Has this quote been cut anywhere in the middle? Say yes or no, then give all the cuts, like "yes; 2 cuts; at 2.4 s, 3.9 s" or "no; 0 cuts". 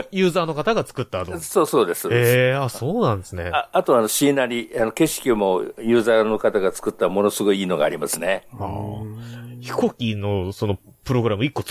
no; 0 cuts